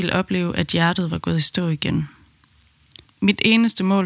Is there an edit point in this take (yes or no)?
yes